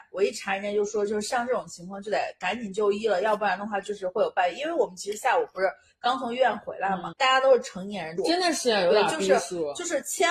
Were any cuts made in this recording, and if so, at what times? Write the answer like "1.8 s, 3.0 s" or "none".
7.1 s, 8.2 s